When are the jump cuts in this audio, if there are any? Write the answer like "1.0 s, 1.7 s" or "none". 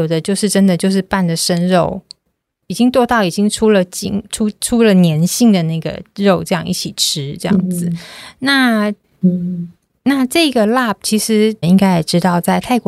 9.0 s, 11.6 s